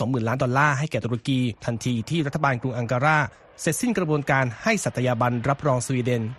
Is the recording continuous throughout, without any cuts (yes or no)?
no